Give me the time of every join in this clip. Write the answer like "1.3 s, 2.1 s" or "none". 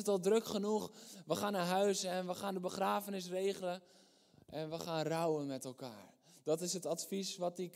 none